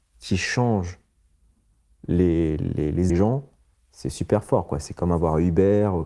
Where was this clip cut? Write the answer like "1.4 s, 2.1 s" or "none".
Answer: 3.1 s